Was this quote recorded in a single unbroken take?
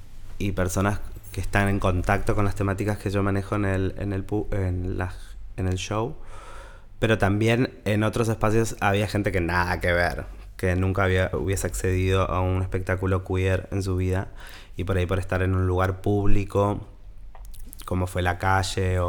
no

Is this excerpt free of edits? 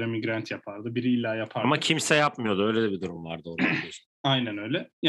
yes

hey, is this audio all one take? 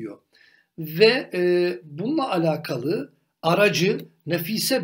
yes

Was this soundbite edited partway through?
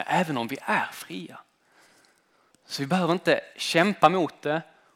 yes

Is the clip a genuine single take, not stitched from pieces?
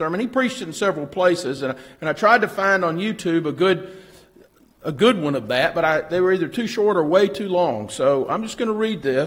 yes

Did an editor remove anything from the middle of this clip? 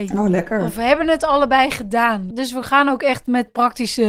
yes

